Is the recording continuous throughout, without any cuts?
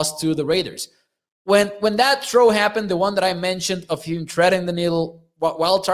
yes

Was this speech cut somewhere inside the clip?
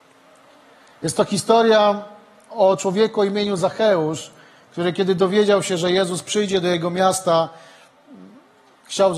no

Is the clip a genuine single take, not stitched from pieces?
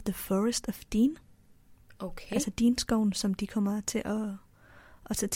yes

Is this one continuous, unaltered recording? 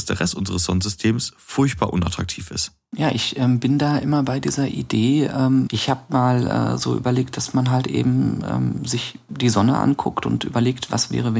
no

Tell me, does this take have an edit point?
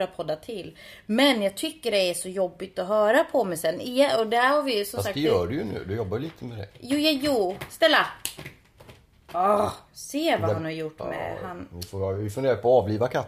no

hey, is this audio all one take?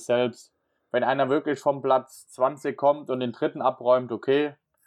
yes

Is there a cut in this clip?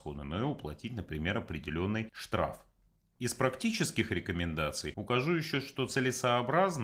no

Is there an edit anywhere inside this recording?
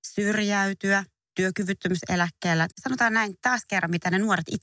yes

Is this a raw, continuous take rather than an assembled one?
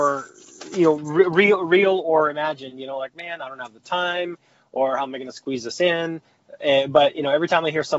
yes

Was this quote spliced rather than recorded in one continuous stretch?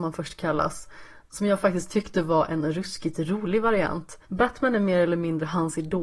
yes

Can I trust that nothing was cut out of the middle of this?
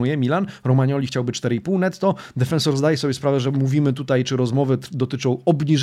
yes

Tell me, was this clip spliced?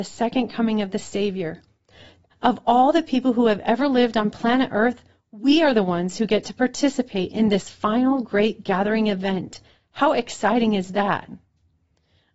yes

